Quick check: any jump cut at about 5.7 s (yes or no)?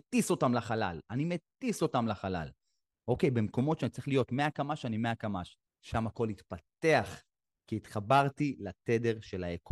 yes